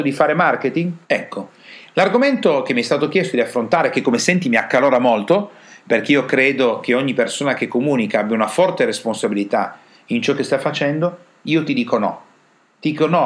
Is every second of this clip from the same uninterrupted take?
no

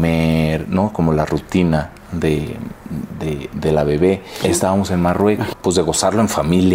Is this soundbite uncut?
no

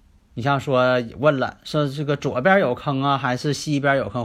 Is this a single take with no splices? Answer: yes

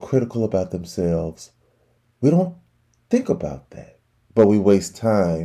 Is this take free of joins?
no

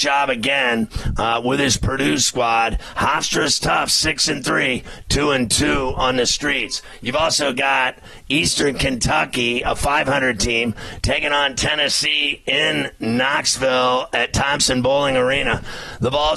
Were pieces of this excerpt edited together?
no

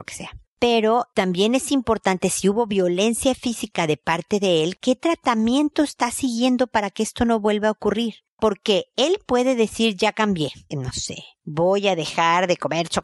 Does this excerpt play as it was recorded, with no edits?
no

